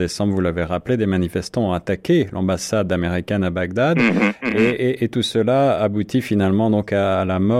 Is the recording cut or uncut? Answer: uncut